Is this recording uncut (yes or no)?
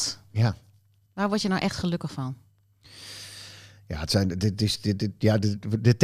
no